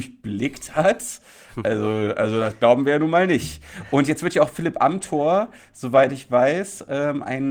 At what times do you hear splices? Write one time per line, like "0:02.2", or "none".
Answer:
none